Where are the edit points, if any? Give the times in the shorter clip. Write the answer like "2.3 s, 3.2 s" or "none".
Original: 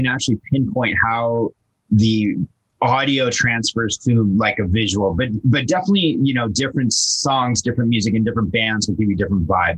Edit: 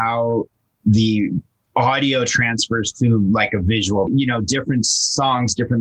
4.1 s